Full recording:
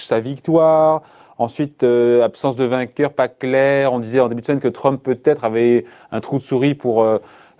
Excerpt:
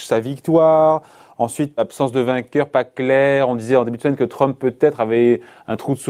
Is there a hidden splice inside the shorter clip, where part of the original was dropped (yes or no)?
yes